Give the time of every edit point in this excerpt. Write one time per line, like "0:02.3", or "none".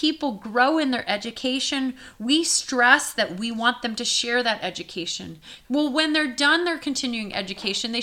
0:05.6